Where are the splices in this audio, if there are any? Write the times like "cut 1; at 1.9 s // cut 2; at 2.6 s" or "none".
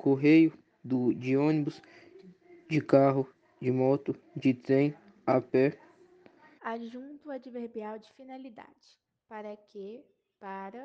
cut 1; at 6.6 s